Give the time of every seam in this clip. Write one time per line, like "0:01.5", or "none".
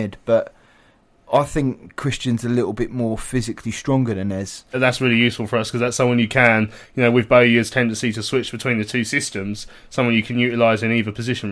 0:04.7